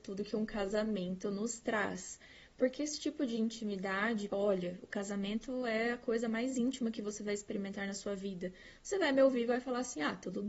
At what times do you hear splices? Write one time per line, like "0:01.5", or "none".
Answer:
0:04.3